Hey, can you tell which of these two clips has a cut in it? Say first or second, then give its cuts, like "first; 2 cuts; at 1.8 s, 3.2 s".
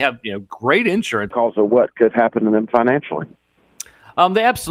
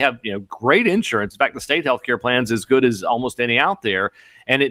first; 1 cut; at 1.3 s